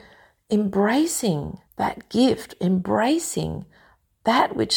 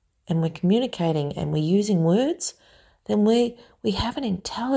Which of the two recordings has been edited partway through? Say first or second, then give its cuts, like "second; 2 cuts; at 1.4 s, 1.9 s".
first; 1 cut; at 1.7 s